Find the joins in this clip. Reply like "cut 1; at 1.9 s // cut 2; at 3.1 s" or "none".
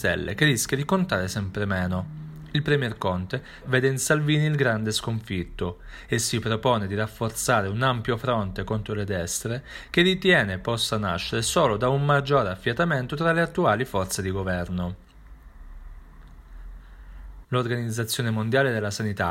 cut 1; at 3.6 s // cut 2; at 17.4 s